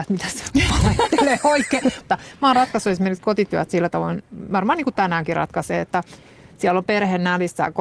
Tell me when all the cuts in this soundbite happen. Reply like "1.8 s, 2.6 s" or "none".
2.0 s